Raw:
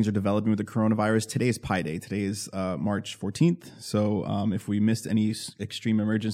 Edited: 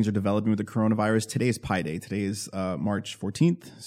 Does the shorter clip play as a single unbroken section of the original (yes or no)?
yes